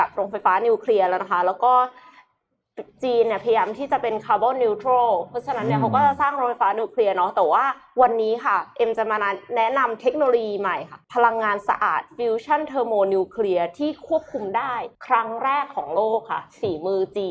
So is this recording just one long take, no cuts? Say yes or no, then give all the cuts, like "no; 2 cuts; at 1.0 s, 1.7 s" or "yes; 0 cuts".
no; 2 cuts; at 11.0 s, 14.9 s